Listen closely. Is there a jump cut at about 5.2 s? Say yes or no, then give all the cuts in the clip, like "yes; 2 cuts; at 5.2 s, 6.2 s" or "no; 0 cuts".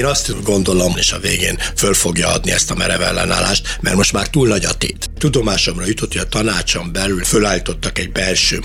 yes; 2 cuts; at 1.0 s, 5.2 s